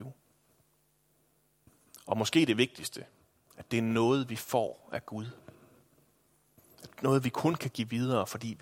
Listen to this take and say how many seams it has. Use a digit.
0